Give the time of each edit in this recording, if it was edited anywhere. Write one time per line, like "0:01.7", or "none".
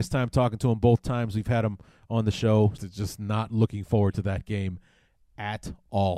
0:02.8